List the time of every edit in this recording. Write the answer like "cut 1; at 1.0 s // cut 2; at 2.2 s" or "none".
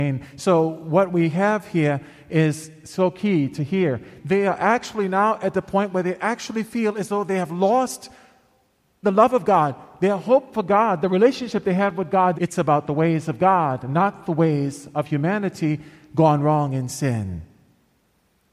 cut 1; at 4.2 s // cut 2; at 9.0 s // cut 3; at 12.3 s